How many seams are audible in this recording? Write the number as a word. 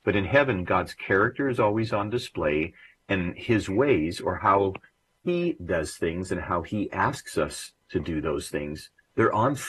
zero